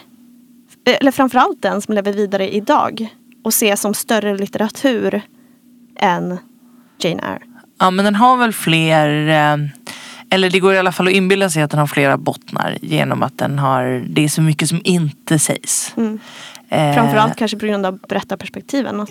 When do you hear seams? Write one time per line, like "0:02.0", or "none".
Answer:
none